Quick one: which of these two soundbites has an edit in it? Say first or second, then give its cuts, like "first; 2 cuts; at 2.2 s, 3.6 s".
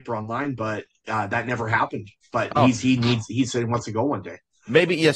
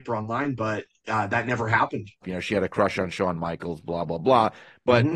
second; 1 cut; at 2.2 s